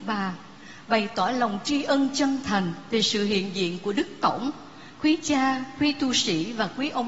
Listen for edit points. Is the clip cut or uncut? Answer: uncut